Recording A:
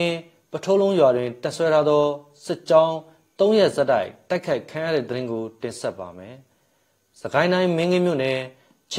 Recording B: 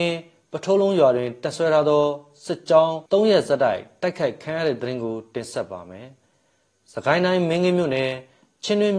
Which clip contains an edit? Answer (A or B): B